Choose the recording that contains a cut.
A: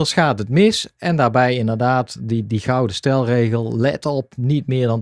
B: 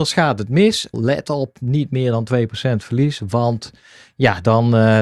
B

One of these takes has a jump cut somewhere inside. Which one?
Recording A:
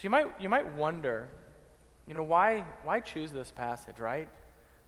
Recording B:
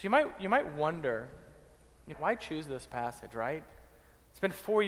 B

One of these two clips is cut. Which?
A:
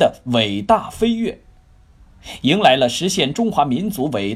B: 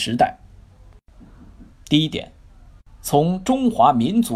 B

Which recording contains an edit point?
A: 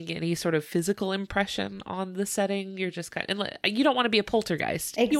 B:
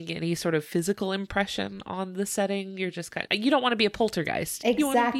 B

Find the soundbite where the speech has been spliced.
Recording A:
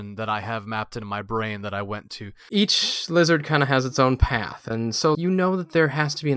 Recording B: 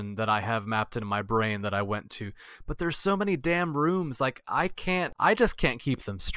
A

